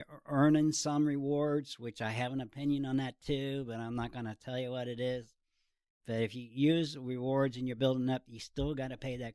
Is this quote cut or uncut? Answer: uncut